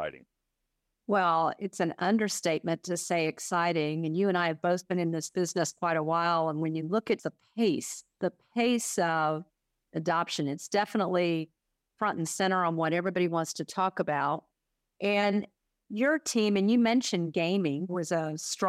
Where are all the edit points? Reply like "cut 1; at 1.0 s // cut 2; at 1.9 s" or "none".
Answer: cut 1; at 8.2 s